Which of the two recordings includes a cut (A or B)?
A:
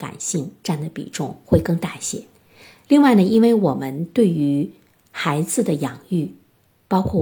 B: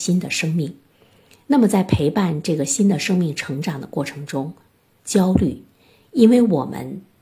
B